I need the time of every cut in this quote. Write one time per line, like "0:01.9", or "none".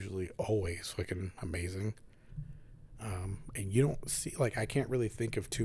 none